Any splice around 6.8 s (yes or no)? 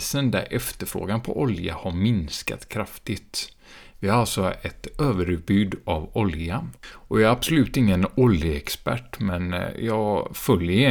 yes